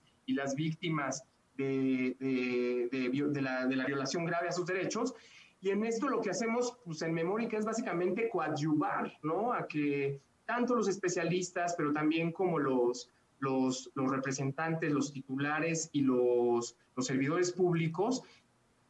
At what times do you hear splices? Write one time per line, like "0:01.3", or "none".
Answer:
none